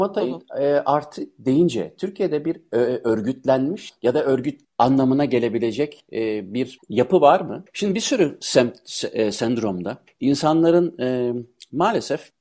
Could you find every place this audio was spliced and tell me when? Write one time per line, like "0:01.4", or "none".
0:07.7